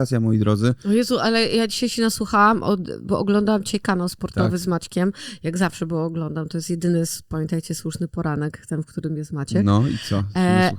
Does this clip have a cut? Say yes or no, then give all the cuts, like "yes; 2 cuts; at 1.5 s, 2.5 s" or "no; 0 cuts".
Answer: no; 0 cuts